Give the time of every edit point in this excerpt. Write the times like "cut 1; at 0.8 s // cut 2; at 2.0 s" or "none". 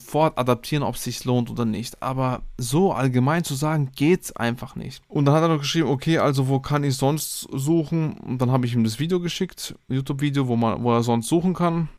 none